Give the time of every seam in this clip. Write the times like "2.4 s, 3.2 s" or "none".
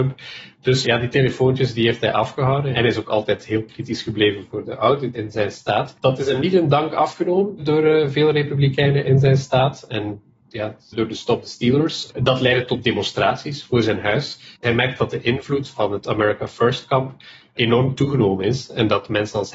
6.0 s, 10.9 s, 14.6 s